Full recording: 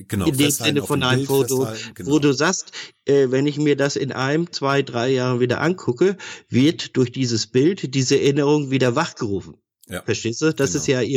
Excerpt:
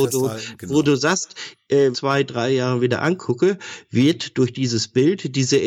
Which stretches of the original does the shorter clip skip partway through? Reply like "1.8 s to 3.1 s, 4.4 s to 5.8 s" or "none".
3.3 s to 4.5 s